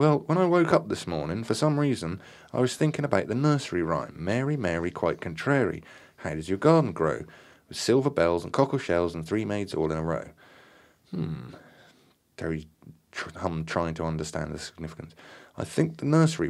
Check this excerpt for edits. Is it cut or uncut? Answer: uncut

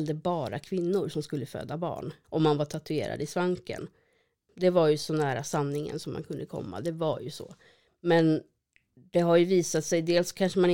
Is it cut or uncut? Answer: cut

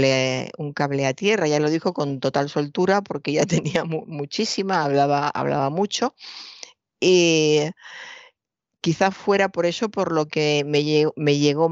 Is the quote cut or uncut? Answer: uncut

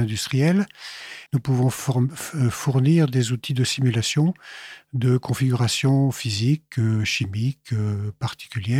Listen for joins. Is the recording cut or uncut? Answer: cut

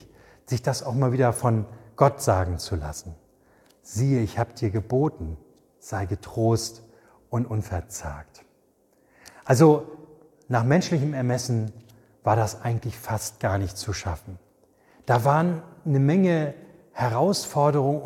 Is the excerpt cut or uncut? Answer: uncut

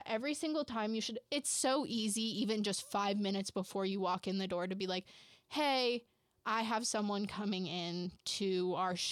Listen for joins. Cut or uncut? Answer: uncut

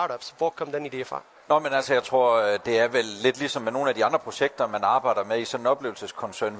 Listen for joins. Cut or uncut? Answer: uncut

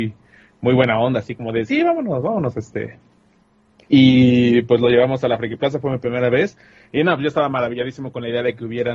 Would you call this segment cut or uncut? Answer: uncut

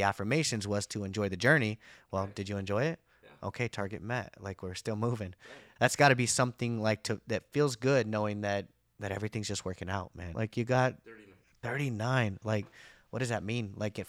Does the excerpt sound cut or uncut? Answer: cut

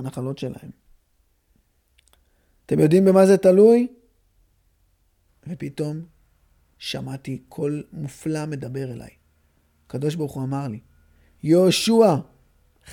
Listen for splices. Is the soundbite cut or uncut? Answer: cut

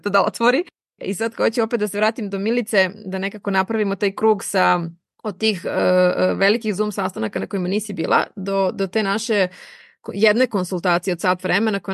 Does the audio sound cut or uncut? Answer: uncut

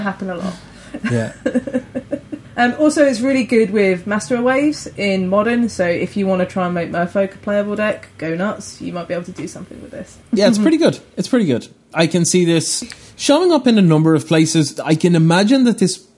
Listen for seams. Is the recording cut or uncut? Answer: uncut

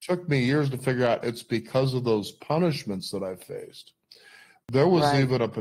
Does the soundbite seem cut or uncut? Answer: uncut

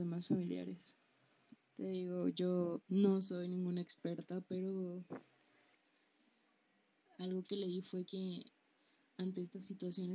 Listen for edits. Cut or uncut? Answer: cut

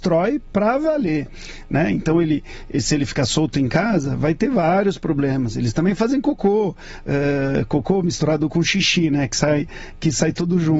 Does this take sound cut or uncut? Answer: uncut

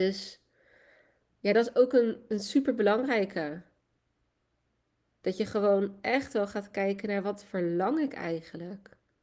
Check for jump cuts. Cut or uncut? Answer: uncut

